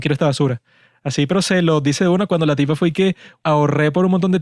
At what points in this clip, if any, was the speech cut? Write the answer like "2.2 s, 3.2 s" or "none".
3.4 s